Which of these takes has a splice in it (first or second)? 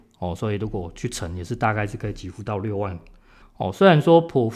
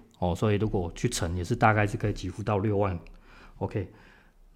first